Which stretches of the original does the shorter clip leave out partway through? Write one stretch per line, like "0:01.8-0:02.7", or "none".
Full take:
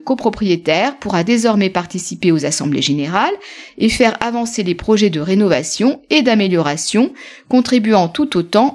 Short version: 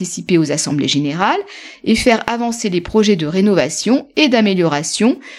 none